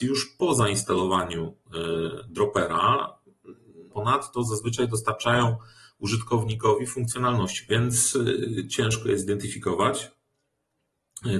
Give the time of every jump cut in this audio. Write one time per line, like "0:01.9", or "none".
0:03.9
0:07.7